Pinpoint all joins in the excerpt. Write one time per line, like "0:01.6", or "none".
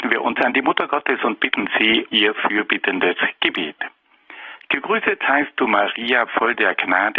0:02.1